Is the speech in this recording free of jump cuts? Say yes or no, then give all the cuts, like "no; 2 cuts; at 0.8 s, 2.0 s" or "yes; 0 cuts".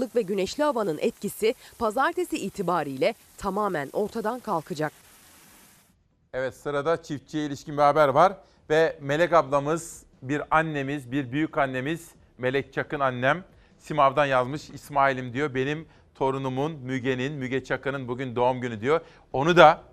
yes; 0 cuts